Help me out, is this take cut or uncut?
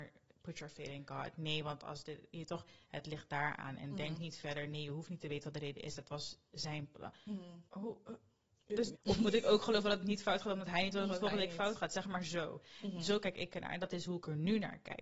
cut